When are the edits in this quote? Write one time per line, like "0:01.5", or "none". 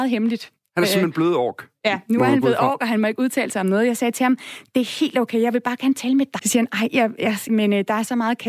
0:06.4
0:07.5